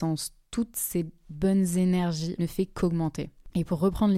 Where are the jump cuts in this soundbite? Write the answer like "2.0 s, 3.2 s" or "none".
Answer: 2.4 s